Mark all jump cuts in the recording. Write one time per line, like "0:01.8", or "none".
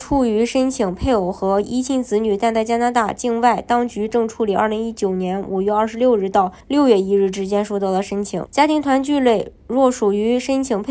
0:06.6
0:08.5